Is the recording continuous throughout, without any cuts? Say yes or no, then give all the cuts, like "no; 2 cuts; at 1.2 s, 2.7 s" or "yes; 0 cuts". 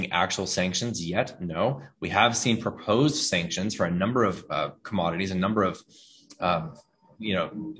yes; 0 cuts